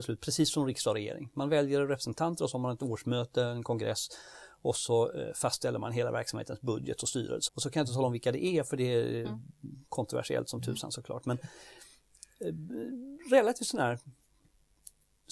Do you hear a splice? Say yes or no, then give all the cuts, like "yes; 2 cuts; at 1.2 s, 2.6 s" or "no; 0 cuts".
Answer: yes; 1 cut; at 7.5 s